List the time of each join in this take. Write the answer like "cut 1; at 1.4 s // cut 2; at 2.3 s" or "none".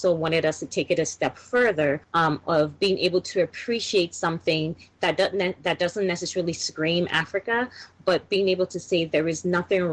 cut 1; at 2.0 s